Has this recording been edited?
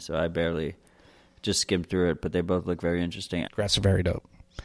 yes; 1 cut; at 3.4 s

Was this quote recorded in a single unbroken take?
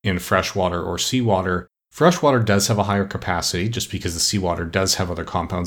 yes; 0 cuts

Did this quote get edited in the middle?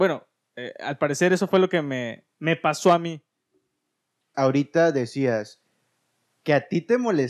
yes; 1 cut; at 4.3 s

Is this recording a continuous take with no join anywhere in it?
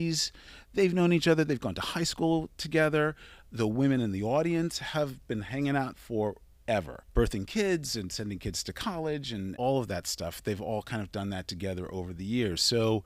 yes; 0 cuts

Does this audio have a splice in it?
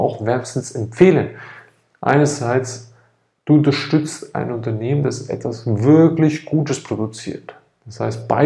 no; 0 cuts

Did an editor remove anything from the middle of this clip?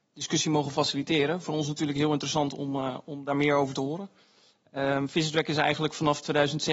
no; 0 cuts

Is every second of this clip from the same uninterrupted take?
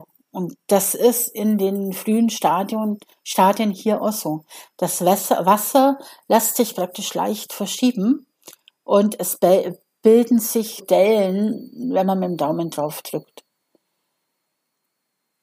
no; 1 cut; at 10.8 s

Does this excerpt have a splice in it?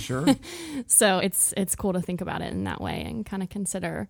no; 0 cuts

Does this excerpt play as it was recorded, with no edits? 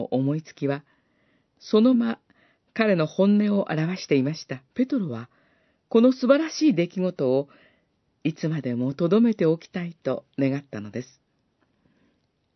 no; 2 cuts; at 1.9 s, 4.7 s

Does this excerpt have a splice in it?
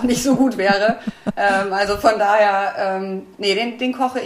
no; 0 cuts

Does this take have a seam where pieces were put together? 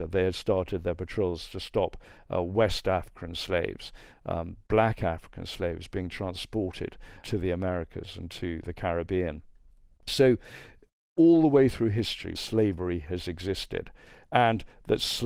yes; 2 cuts; at 7.2 s, 12.4 s

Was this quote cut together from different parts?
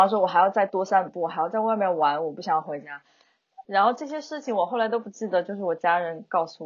yes; 1 cut; at 3.6 s

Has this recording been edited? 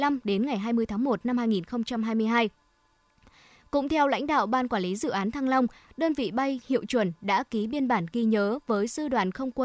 yes; 1 cut; at 5.9 s

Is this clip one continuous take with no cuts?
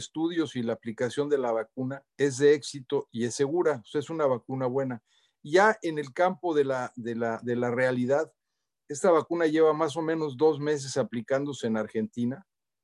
no; 1 cut; at 2.1 s

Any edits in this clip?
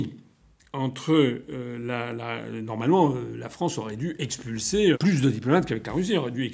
yes; 1 cut; at 4.9 s

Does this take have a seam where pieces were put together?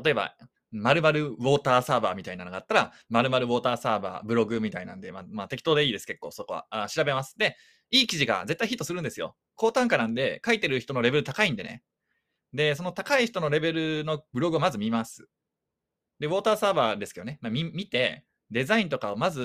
no; 0 cuts

